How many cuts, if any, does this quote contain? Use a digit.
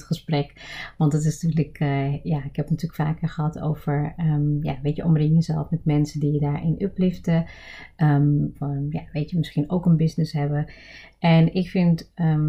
1